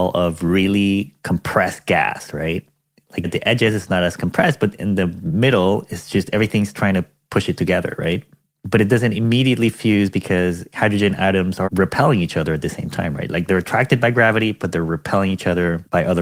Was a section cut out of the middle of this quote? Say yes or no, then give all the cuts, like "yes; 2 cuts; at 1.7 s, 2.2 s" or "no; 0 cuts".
yes; 2 cuts; at 3.2 s, 11.6 s